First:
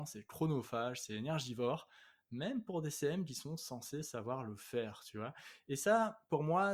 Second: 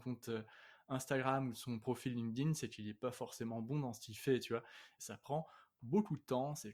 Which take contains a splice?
second; 1 cut; at 5.0 s

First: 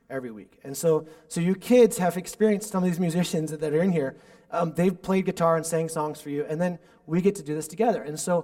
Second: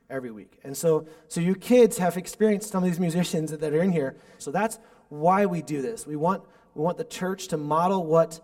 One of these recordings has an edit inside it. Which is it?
second; 1 cut; at 4.4 s

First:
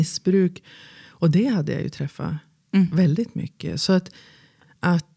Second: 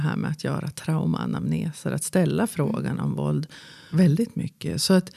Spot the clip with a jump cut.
second; 1 cut; at 3.9 s

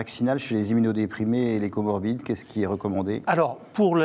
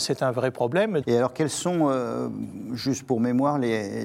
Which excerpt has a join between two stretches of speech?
second; 1 cut; at 1.0 s

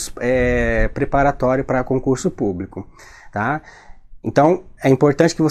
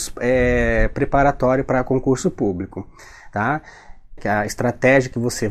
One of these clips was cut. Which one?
second; 1 cut; at 4.2 s

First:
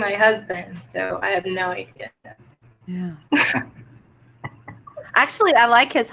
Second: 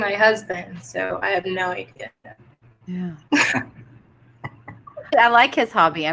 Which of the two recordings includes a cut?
second; 1 cut; at 5.1 s

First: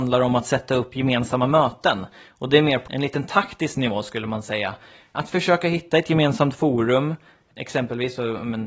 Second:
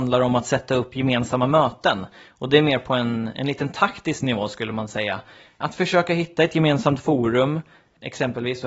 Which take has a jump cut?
first; 1 cut; at 2.9 s

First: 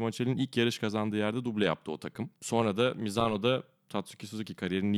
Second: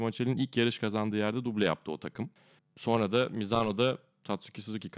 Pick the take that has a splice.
first; 1 cut; at 2.4 s

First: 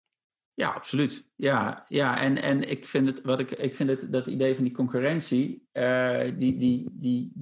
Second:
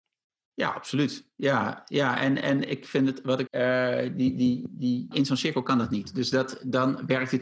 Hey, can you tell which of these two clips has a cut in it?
second; 2 cuts; at 3.5 s, 5.1 s

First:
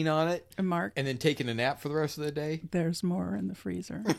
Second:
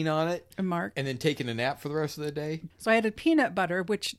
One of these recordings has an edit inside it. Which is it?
second; 1 cut; at 2.7 s

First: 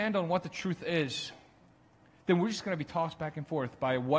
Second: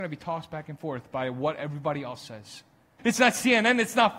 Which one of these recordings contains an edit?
second; 1 cut; at 3.0 s

